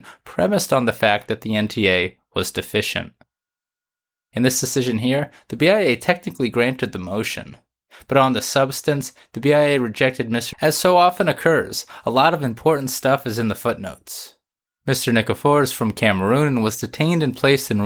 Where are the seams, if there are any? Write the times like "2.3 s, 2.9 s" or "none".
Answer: 10.5 s, 14.7 s